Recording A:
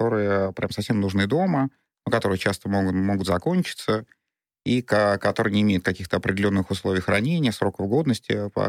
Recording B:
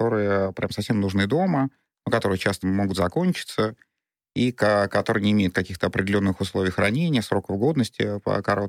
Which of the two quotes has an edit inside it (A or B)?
B